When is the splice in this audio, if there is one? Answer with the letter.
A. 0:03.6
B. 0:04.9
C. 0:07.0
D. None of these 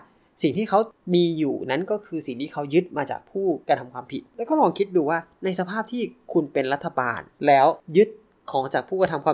A